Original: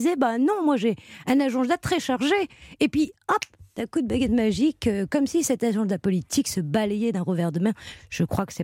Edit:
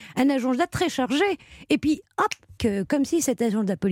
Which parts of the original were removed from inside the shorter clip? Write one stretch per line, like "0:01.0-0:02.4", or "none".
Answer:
0:03.7-0:04.8